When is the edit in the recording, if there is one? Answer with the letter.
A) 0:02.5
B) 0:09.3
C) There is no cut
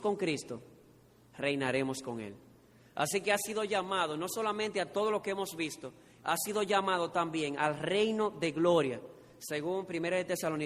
C